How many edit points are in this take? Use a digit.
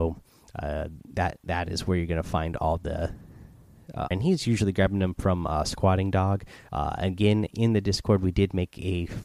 2